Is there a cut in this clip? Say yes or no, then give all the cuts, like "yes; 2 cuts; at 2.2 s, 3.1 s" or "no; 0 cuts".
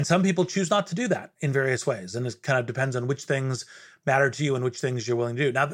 no; 0 cuts